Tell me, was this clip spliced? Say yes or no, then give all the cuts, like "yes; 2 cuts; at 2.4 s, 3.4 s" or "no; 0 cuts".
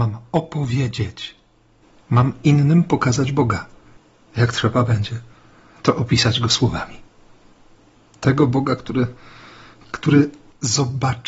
no; 0 cuts